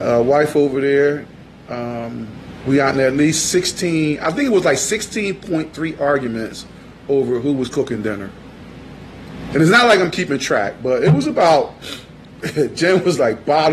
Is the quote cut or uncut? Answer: uncut